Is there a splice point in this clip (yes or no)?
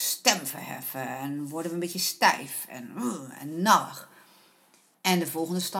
no